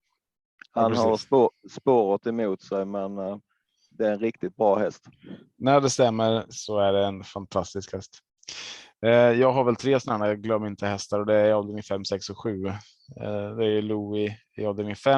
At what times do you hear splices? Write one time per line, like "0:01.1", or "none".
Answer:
none